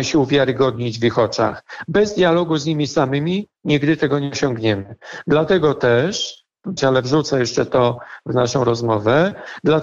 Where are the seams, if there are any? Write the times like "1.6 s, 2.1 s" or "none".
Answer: 6.8 s

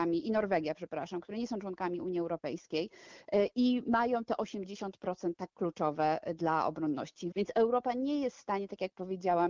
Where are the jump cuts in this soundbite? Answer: 7.3 s

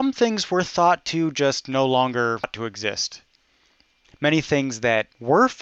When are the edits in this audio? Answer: none

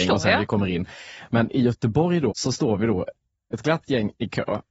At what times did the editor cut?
2.3 s

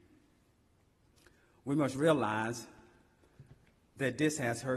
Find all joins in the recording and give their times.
none

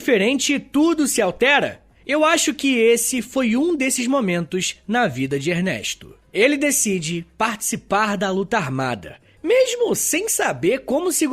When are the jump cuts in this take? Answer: none

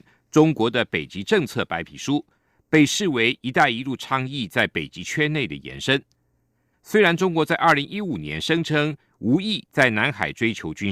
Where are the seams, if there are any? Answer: 6.7 s

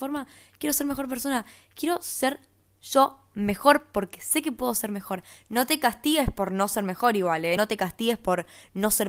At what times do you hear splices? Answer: none

